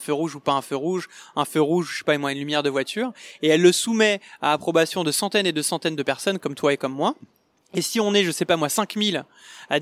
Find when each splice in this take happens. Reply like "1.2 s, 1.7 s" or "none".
none